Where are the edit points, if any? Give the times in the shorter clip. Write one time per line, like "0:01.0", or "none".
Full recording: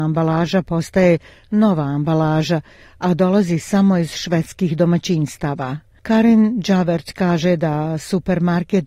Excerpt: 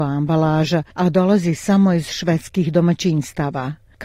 0:00.9